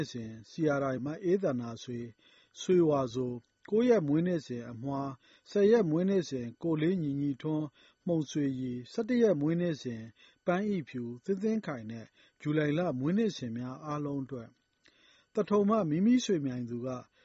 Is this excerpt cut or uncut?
cut